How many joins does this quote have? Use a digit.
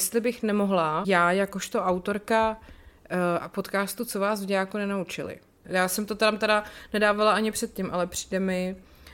2